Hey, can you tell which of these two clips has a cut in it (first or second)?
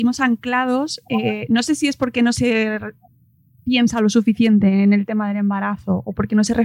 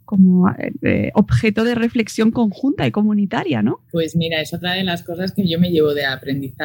second